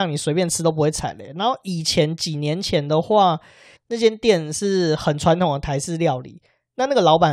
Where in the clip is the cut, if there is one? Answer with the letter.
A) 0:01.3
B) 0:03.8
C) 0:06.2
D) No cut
B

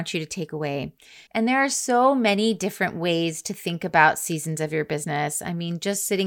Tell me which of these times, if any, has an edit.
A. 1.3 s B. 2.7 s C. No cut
A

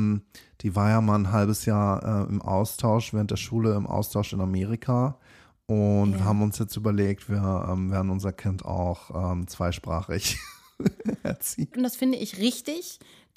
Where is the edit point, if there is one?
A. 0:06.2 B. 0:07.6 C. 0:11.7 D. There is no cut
C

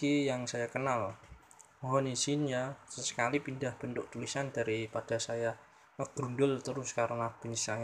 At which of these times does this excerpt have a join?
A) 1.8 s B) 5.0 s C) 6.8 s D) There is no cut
D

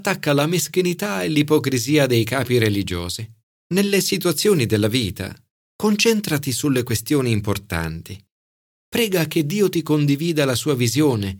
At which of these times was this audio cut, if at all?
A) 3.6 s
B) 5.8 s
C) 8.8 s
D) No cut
A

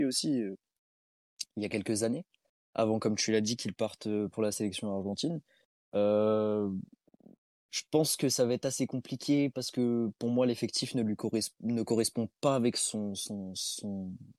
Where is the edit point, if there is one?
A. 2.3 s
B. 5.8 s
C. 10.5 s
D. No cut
D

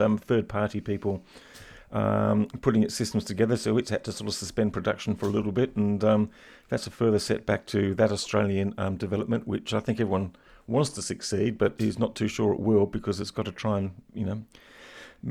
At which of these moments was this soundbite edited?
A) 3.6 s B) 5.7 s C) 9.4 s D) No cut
D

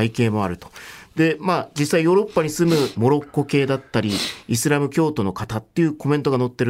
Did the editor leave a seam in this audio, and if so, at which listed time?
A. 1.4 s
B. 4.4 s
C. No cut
C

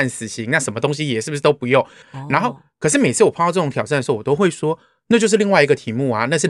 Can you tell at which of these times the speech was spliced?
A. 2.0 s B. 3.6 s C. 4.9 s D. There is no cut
A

